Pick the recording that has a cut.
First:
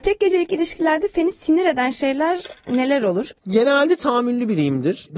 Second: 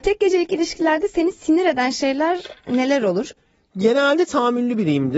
first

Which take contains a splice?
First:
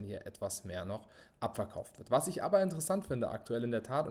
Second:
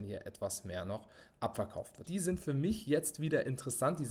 second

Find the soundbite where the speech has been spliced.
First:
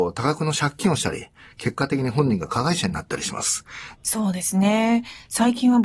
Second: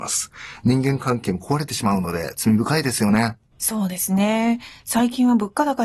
first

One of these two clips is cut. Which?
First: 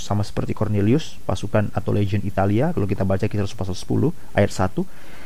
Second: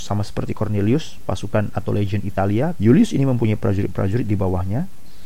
second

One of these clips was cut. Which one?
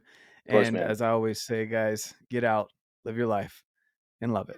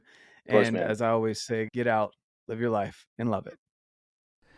second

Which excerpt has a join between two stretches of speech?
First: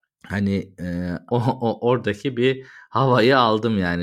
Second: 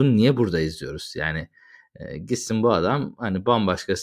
first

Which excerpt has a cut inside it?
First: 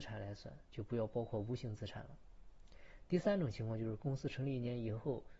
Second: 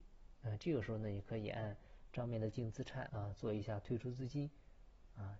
second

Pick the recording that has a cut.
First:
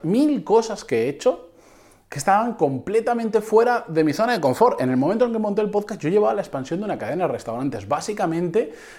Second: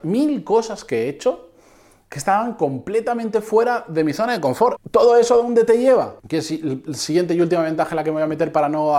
second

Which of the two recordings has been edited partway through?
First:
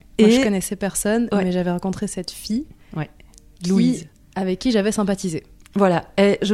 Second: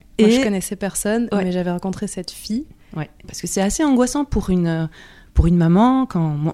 second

